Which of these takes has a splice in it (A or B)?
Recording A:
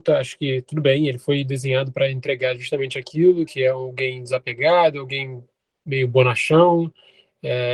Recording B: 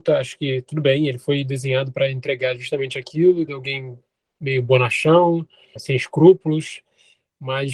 B